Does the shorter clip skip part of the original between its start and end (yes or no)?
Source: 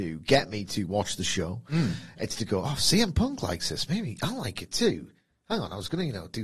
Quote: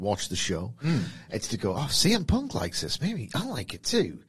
no